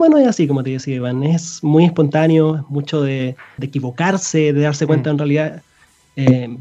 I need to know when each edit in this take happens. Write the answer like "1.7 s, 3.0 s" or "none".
3.6 s